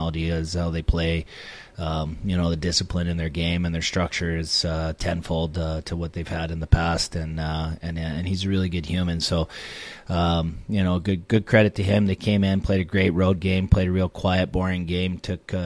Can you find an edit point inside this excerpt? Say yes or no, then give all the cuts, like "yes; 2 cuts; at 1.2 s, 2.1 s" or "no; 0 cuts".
no; 0 cuts